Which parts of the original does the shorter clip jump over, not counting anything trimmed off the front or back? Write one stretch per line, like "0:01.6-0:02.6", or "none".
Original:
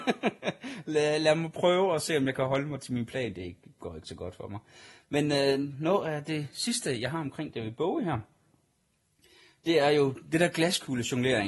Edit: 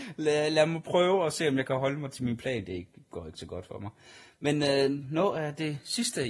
none